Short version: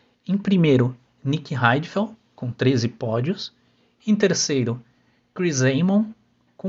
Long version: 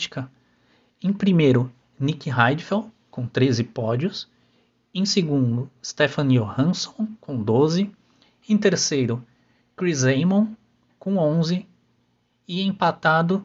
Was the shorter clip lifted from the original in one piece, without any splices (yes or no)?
no